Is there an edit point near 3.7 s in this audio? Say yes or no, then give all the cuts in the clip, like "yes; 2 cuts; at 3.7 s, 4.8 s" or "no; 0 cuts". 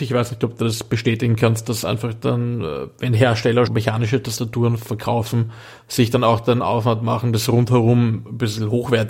yes; 1 cut; at 3.7 s